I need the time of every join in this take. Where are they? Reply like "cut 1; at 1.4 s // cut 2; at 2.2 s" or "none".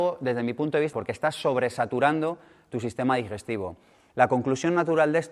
cut 1; at 0.9 s // cut 2; at 4.1 s